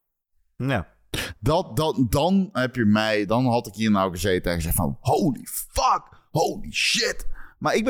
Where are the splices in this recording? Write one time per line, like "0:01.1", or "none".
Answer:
none